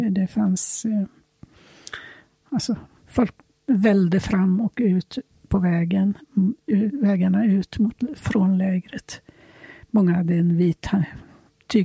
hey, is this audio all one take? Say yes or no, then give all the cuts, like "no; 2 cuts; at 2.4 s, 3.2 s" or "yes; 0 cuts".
yes; 0 cuts